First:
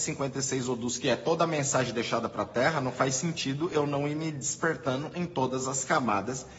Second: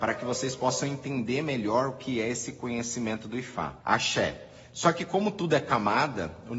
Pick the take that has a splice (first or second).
second